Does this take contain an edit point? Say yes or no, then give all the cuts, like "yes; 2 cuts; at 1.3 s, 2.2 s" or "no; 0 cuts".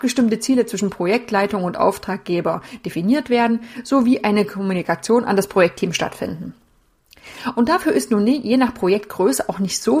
no; 0 cuts